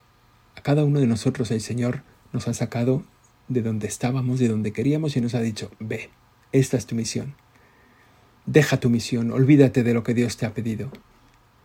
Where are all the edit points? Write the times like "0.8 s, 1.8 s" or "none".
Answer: 8.4 s